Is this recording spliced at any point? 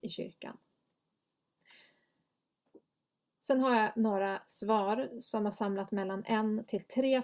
no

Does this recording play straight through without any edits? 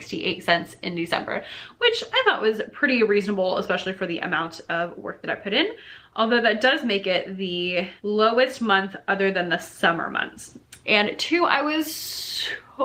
no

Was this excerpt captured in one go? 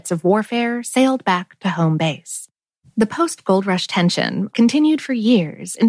no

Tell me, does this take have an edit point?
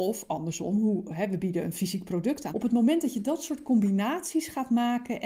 yes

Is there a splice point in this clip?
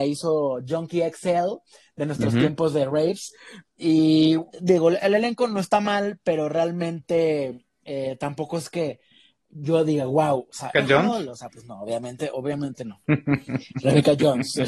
yes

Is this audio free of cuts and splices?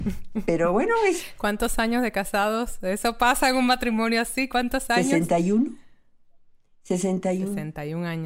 yes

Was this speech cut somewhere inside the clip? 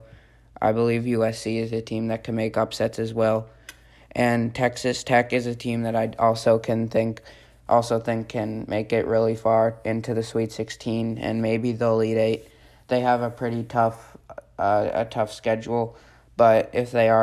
no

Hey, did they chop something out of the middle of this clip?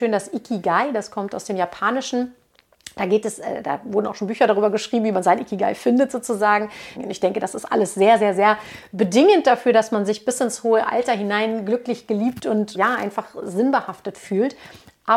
yes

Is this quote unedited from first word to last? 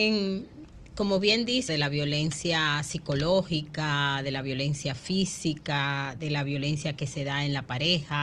no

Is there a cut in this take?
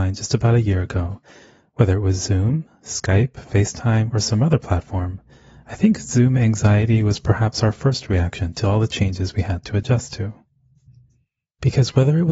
no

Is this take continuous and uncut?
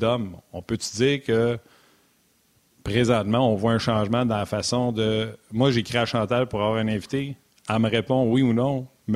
yes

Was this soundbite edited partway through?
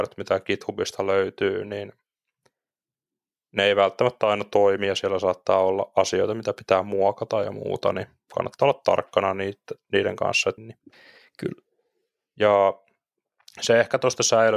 yes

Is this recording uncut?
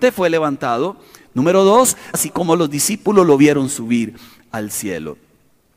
no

